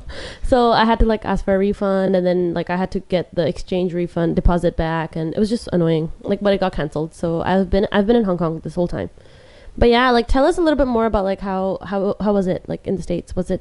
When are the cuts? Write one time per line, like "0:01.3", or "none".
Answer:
none